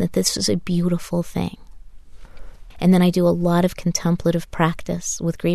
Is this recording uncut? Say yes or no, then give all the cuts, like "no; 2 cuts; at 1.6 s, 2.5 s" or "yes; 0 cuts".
no; 1 cut; at 2.7 s